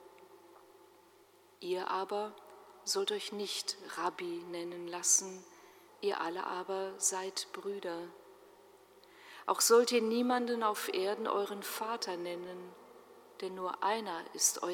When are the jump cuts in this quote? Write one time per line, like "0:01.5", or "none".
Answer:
0:05.9